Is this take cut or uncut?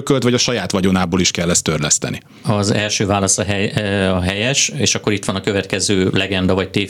uncut